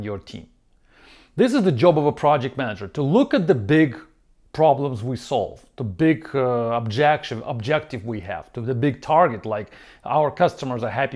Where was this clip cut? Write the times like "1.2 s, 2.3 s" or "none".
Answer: none